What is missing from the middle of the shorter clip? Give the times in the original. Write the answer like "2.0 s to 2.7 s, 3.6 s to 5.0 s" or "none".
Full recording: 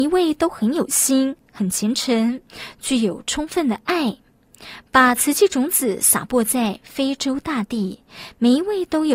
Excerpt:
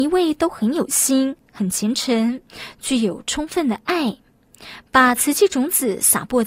none

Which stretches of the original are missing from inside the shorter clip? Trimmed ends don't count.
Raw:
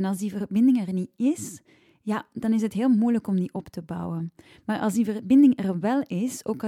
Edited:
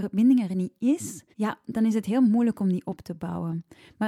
1.7 s to 2.0 s

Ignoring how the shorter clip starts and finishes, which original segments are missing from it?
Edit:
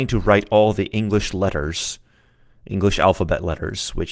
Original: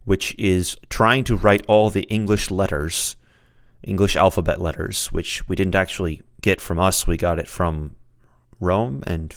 none

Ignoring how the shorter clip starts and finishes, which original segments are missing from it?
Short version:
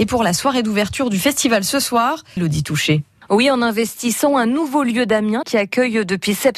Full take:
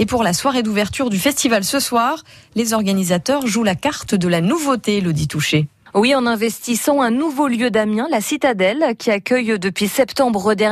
2.4 s to 5.0 s, 8.1 s to 9.0 s

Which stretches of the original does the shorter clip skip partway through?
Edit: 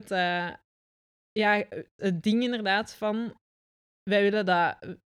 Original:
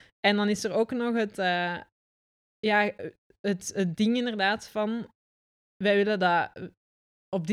3.3 s to 3.7 s

